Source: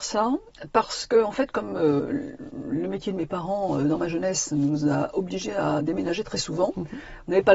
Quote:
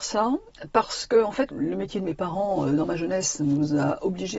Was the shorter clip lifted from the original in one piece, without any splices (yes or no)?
no